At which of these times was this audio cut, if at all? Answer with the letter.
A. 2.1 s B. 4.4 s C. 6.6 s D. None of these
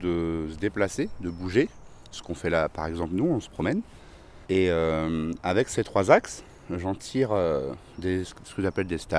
B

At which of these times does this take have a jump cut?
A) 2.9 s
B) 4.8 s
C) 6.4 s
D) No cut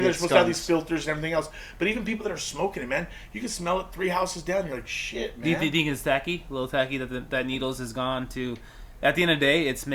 D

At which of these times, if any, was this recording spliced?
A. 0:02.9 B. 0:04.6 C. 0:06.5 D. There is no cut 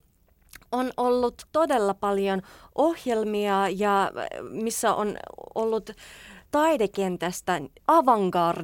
C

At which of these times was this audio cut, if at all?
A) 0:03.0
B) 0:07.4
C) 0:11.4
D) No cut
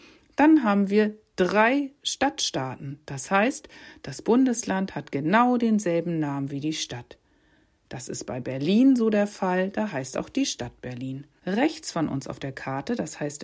C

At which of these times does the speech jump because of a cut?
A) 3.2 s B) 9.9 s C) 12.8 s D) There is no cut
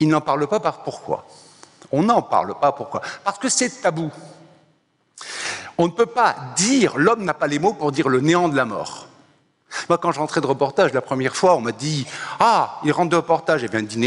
B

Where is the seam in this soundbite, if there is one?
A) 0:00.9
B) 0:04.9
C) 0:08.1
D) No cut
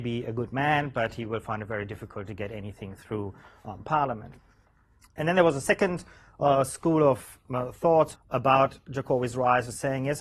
C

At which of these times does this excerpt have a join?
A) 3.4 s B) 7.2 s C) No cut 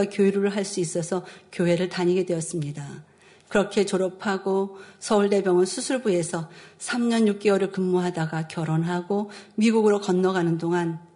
A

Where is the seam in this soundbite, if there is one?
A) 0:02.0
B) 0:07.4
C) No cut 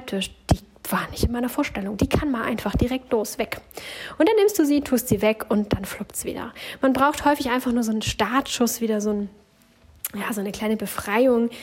C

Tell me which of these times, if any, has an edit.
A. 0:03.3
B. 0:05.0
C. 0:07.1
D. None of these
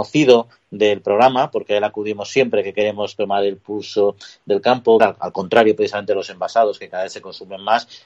B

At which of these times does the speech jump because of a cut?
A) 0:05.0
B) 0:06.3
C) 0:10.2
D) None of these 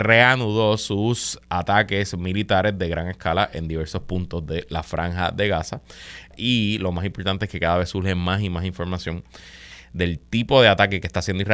B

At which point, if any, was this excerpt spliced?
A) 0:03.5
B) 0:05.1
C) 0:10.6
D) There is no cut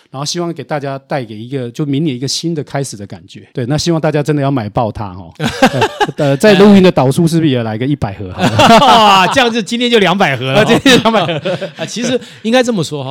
A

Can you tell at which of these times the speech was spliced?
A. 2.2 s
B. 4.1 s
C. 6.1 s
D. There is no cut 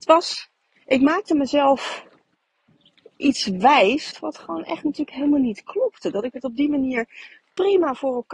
B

